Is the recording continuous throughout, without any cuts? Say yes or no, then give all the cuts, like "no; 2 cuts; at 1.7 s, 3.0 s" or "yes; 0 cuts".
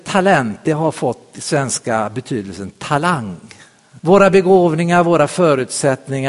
no; 1 cut; at 4.0 s